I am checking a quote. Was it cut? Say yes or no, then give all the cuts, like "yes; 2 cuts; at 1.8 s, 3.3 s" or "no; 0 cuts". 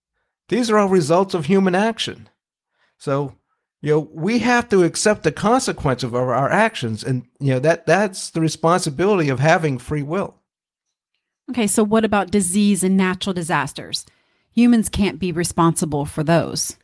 no; 0 cuts